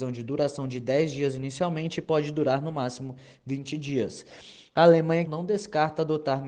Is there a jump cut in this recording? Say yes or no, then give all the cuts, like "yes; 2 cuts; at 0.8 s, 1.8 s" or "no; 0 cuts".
yes; 1 cut; at 5.3 s